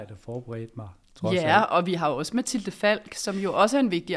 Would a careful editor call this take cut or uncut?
uncut